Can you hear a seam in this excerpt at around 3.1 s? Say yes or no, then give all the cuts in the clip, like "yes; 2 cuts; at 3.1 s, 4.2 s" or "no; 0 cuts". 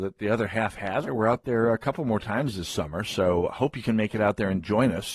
no; 1 cut; at 1.1 s